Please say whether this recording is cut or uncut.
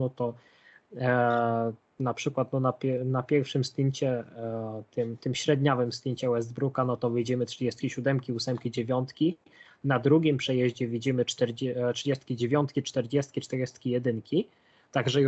uncut